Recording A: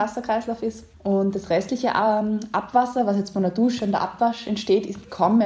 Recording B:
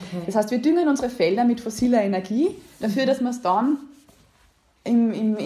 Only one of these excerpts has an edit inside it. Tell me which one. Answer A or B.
A